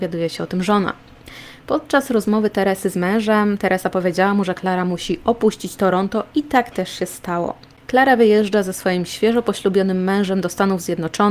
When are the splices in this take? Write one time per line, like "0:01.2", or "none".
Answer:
none